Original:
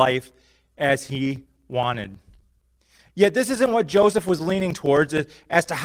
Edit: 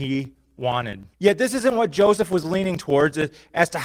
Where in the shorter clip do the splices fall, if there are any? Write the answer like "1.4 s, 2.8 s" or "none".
1.1 s

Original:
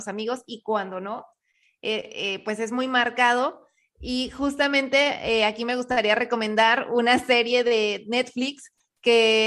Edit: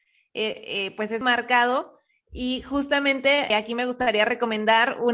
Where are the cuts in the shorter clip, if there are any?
1.2 s, 3.5 s

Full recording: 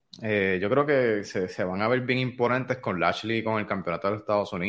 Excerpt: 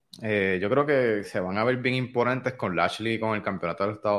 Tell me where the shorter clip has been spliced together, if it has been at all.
1.2 s

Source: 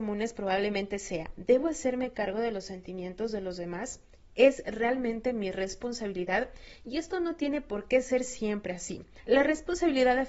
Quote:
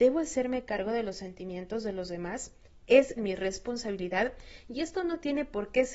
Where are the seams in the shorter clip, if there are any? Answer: 3.2 s

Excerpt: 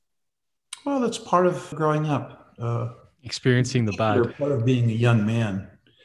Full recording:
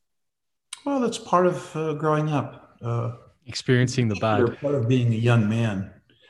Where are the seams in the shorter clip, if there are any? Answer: 1.7 s

